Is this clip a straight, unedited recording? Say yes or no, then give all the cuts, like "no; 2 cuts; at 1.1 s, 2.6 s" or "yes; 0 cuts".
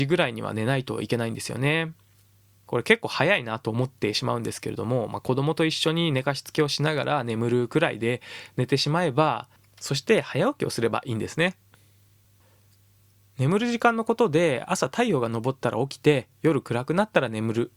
yes; 0 cuts